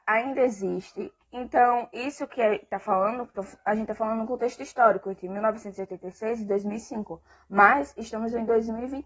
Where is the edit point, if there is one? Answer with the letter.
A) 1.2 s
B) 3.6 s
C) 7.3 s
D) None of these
A